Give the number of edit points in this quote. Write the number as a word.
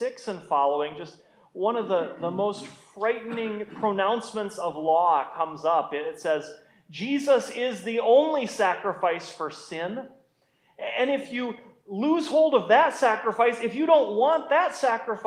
zero